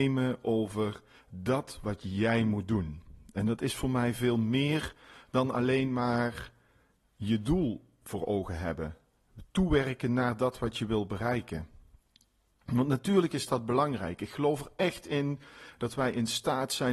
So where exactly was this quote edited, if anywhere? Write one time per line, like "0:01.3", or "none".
none